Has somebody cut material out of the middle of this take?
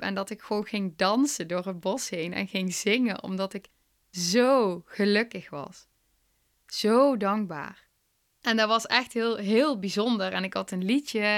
no; 0 cuts

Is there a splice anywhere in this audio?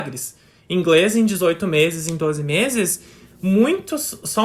no; 0 cuts

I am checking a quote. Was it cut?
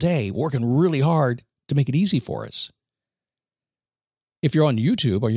no; 0 cuts

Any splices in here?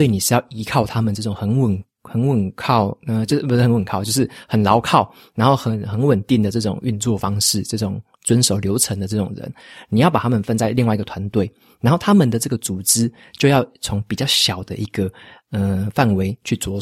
no; 0 cuts

